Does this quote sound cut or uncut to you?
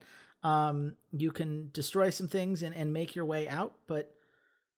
uncut